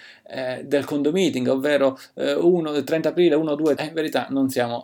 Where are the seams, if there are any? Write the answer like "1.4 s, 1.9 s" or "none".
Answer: 3.8 s